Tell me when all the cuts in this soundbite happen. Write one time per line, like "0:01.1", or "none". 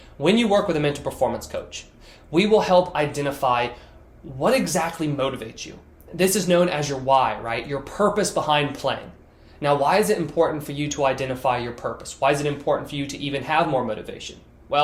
none